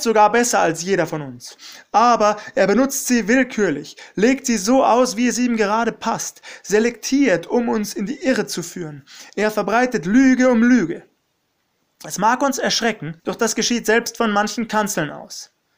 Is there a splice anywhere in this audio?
yes; 1 cut; at 13.2 s

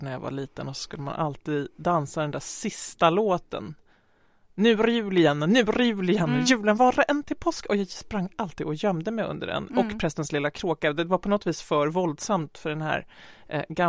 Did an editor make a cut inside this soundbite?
no; 0 cuts

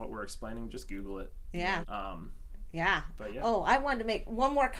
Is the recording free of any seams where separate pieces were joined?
no; 1 cut; at 1.8 s

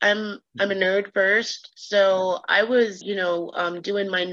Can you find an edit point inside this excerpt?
yes; 1 cut; at 3.0 s

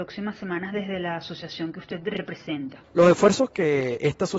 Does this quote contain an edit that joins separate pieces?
yes; 1 cut; at 2.8 s

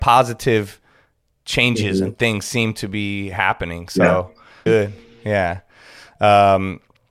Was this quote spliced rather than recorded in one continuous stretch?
yes; 1 cut; at 4.7 s

